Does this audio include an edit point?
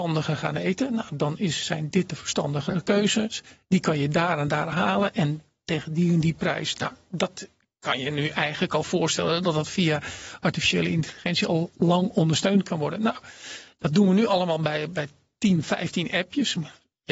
no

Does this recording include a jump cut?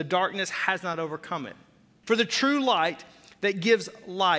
yes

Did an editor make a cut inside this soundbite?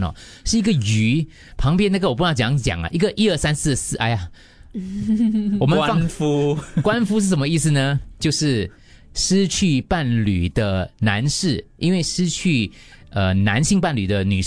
no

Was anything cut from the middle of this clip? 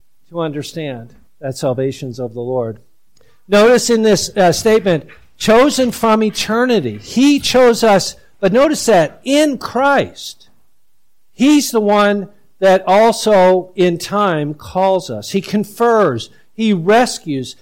no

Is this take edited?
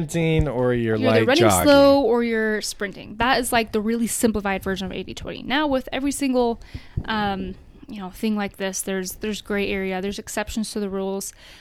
no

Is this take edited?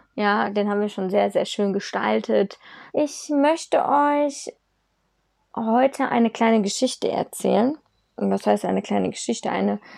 yes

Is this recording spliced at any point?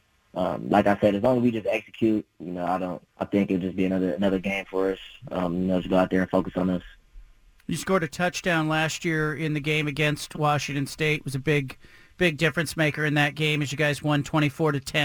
yes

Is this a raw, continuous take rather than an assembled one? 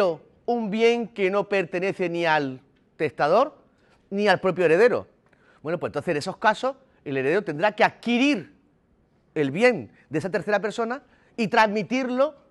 yes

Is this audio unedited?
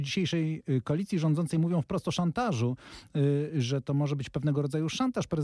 yes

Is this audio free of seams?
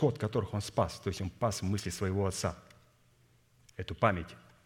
yes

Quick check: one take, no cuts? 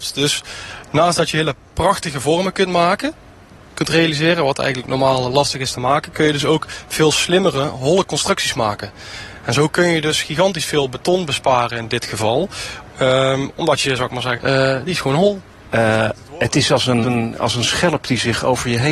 no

